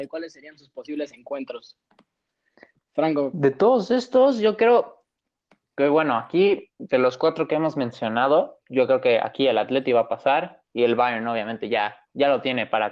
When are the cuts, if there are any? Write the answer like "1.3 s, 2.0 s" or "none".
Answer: 10.7 s

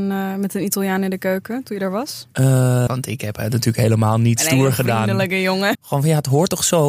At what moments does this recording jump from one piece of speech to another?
2.9 s, 5.7 s

